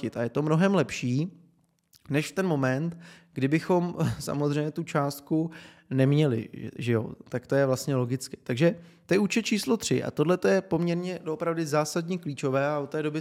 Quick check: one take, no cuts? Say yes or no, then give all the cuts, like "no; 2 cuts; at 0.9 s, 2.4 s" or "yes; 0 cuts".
yes; 0 cuts